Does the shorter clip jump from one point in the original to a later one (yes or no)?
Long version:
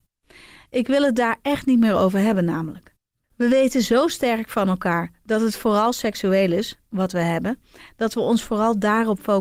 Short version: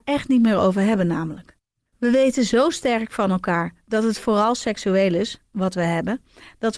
no